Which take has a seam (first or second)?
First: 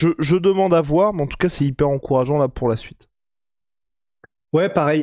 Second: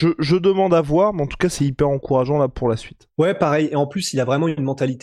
second